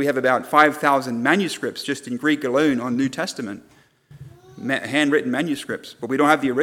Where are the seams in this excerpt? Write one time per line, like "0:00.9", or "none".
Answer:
none